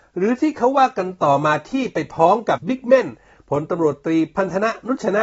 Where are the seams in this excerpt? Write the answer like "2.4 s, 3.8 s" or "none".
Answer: 2.6 s